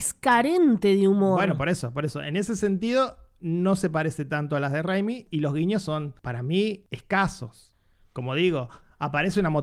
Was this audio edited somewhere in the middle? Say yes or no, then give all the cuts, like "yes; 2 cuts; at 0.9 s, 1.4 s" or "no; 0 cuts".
no; 0 cuts